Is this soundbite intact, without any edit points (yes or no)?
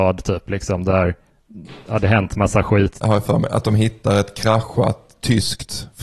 no